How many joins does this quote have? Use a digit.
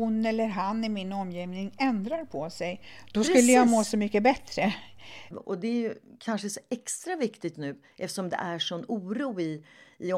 2